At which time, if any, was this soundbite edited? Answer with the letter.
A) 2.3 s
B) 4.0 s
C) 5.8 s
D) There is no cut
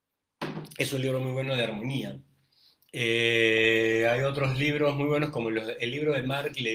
D